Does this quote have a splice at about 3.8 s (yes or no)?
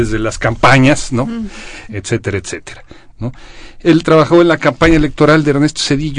yes